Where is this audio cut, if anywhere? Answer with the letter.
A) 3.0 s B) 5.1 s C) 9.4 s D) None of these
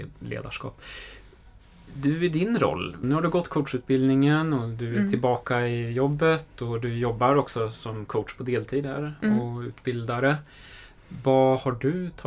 A